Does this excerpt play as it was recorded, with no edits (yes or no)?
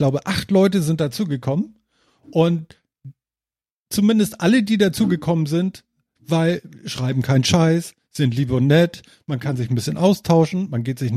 no